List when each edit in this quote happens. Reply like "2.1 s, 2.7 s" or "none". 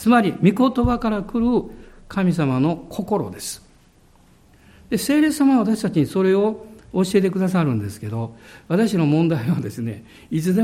none